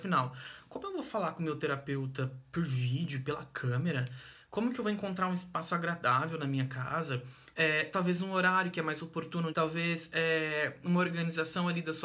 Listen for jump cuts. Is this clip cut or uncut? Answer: cut